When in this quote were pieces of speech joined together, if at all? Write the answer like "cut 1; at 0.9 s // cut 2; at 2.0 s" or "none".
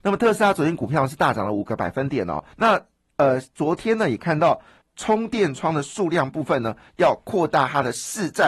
cut 1; at 2.5 s // cut 2; at 4.8 s